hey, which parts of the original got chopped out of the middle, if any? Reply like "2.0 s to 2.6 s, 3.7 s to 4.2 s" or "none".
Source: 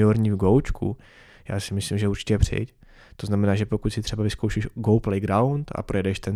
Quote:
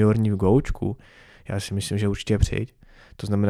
none